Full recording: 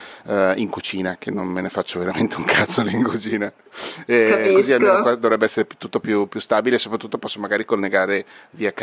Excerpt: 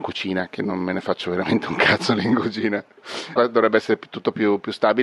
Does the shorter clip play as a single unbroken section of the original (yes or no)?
no